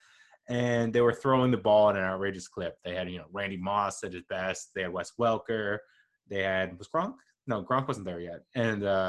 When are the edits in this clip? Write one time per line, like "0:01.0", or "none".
none